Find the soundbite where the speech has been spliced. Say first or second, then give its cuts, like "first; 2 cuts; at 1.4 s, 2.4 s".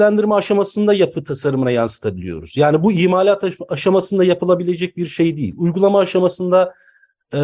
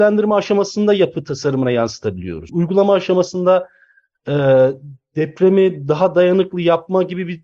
second; 1 cut; at 2.5 s